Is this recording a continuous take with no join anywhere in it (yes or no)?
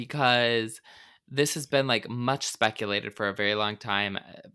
yes